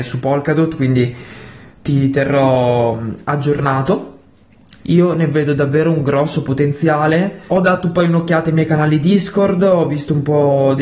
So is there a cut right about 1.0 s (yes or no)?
no